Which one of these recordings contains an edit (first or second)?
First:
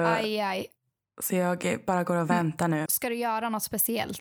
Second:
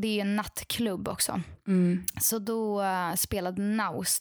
first